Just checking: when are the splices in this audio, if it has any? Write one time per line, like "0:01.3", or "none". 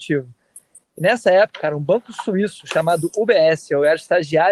0:01.5